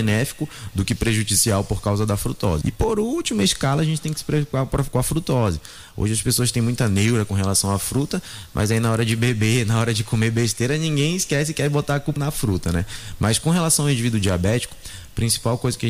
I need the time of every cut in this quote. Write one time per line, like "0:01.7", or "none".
0:02.6
0:12.2

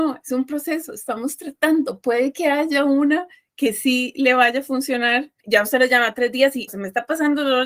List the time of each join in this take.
0:05.4
0:06.7

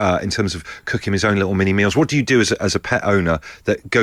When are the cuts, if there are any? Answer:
none

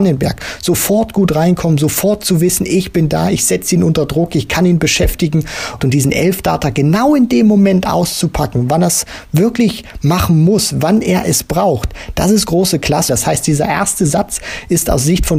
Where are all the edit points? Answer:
0:05.8
0:13.1

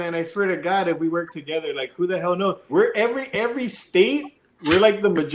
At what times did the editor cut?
0:02.7

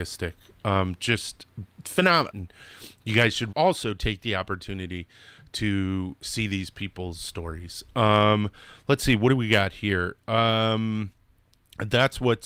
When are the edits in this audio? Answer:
0:02.3
0:03.5

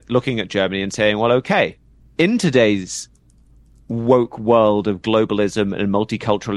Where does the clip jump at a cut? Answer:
0:02.0

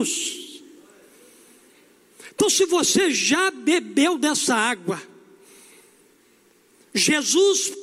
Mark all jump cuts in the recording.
none

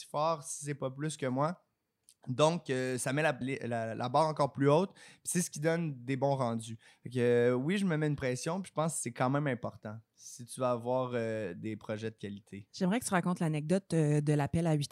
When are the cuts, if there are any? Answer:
0:03.4

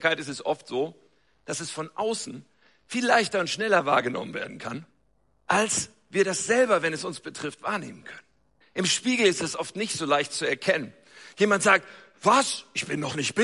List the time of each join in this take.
none

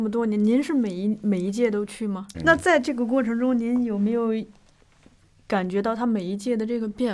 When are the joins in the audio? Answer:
0:02.3

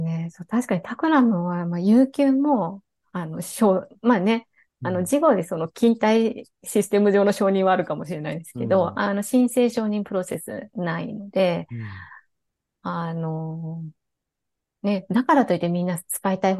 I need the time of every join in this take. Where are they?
none

